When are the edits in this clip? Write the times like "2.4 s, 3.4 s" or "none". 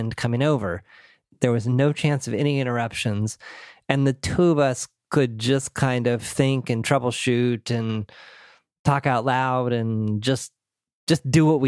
1.3 s